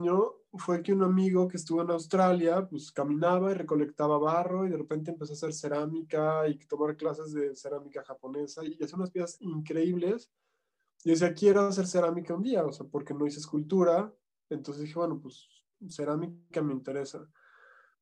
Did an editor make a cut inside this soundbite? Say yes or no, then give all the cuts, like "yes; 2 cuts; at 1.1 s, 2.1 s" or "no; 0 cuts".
no; 0 cuts